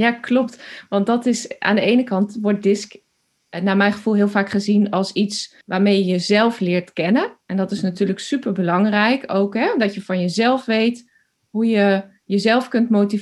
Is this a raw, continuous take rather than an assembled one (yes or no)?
no